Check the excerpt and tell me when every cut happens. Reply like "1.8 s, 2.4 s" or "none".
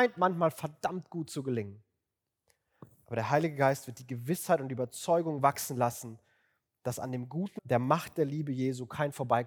7.6 s